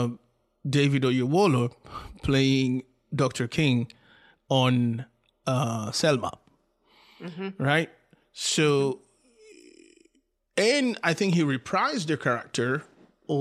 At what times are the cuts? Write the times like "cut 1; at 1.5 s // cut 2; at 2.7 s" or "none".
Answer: none